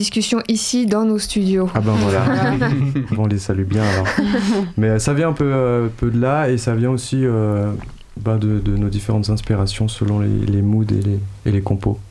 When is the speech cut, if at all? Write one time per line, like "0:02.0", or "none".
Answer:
none